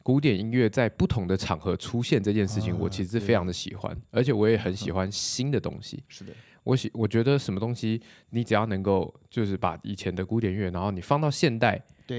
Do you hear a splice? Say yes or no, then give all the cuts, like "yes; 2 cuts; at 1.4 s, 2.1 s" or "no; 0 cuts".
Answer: no; 0 cuts